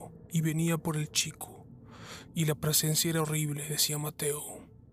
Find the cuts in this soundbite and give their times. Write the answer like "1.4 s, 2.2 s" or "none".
none